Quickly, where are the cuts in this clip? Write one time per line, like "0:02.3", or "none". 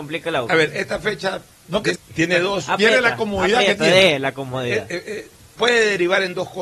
0:01.9